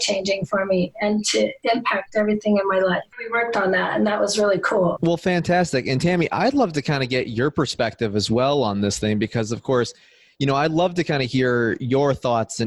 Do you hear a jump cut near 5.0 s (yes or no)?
yes